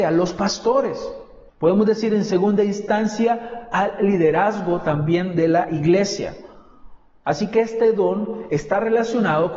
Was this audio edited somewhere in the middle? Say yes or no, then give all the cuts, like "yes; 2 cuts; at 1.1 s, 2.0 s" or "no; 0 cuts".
yes; 2 cuts; at 1.5 s, 7.2 s